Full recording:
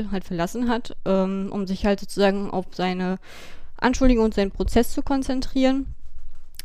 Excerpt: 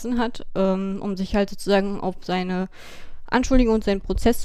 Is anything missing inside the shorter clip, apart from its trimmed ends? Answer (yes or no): no